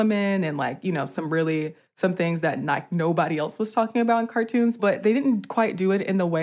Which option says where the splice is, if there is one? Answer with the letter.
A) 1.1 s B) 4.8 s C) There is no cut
B